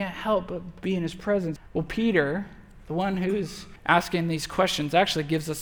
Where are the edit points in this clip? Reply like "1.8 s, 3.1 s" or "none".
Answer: 1.6 s, 3.8 s